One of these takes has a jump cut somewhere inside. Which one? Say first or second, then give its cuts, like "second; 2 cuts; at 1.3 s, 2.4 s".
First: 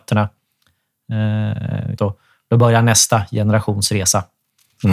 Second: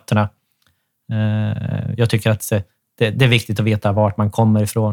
first; 1 cut; at 2.0 s